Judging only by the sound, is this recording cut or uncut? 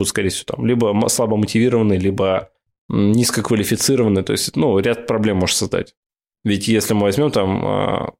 cut